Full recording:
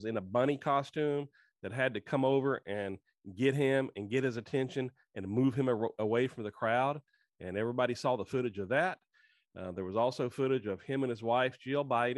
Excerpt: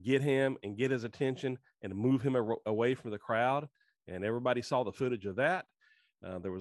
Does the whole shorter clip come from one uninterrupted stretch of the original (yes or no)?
yes